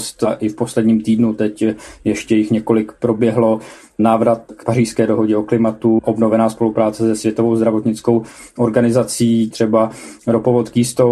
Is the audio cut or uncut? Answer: cut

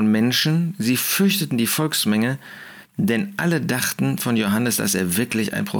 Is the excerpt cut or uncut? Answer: uncut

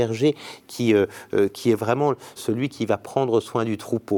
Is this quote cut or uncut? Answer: cut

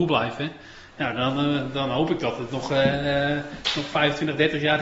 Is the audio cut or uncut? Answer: uncut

